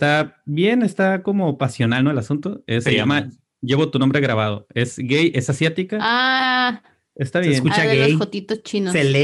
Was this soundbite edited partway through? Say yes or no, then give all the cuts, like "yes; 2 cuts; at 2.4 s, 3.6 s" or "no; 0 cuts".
yes; 1 cut; at 2.8 s